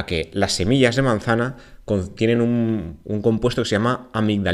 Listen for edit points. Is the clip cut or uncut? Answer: uncut